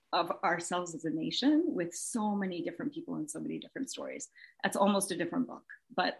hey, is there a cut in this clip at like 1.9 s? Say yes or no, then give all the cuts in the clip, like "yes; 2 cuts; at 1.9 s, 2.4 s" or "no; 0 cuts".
no; 0 cuts